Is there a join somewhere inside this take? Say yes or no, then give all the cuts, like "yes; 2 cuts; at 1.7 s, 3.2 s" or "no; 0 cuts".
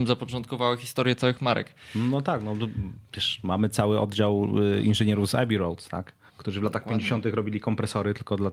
yes; 1 cut; at 6.3 s